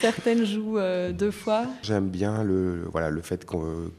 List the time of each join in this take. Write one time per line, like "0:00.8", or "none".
0:01.8